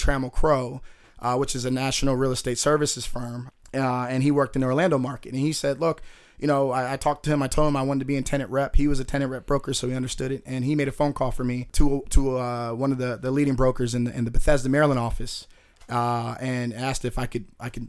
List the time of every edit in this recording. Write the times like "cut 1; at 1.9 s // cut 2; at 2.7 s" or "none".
none